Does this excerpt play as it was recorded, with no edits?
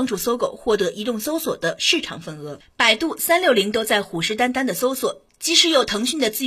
yes; 0 cuts

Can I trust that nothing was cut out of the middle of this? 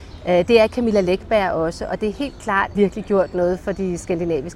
no; 1 cut; at 2.7 s

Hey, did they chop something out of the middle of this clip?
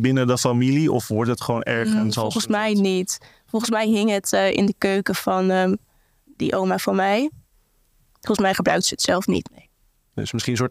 yes; 2 cuts; at 6.3 s, 9.4 s

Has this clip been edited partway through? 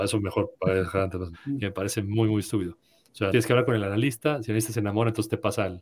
yes; 2 cuts; at 1.3 s, 3.3 s

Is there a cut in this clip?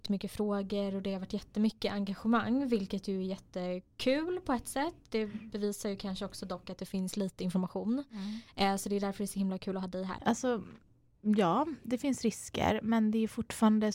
yes; 1 cut; at 10.2 s

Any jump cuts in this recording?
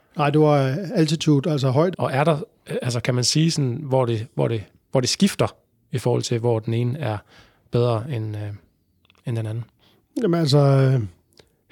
yes; 1 cut; at 1.9 s

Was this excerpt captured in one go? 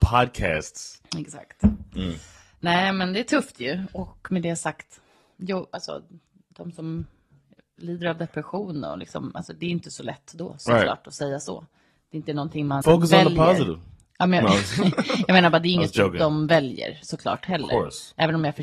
no; 1 cut; at 12.8 s

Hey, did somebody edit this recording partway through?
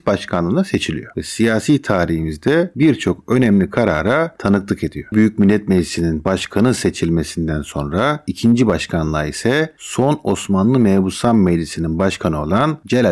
yes; 2 cuts; at 1.1 s, 5.1 s

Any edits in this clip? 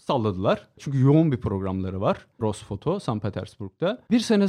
yes; 1 cut; at 2.4 s

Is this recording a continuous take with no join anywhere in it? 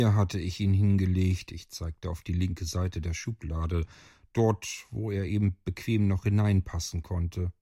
yes; 0 cuts

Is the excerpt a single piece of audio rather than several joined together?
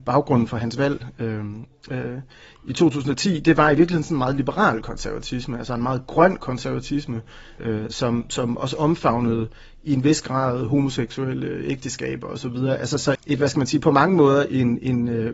no; 2 cuts; at 7.6 s, 13.2 s

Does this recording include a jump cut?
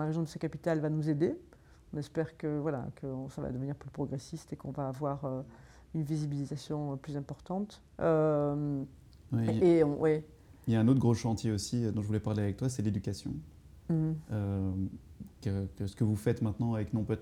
yes; 1 cut; at 7.9 s

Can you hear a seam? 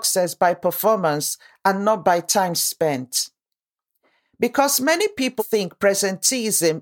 yes; 1 cut; at 5.4 s

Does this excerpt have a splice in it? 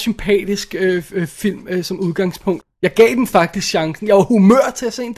yes; 1 cut; at 2.6 s

